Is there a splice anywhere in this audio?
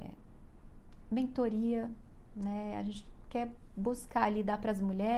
no; 0 cuts

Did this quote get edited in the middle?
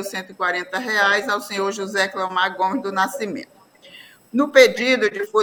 yes; 1 cut; at 4.2 s

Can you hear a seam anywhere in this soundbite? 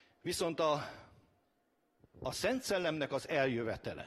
no; 0 cuts

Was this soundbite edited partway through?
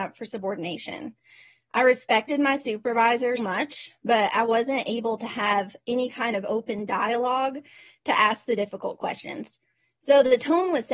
yes; 1 cut; at 3.4 s

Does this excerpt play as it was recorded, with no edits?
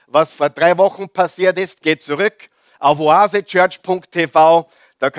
yes; 0 cuts

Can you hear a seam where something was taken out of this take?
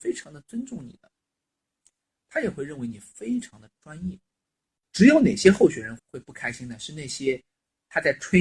yes; 1 cut; at 6.0 s

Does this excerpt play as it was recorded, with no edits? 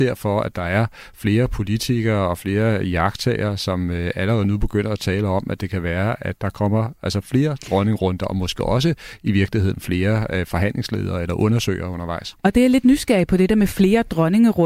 yes; 0 cuts

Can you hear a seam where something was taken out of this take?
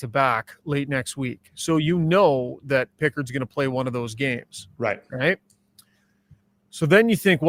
no; 0 cuts

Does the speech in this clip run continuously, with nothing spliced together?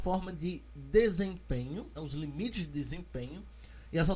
no; 1 cut; at 2.0 s

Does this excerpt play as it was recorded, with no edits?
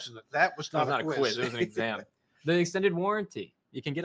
yes; 0 cuts

